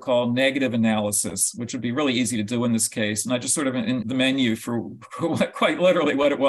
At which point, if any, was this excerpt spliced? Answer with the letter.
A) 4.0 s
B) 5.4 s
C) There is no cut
A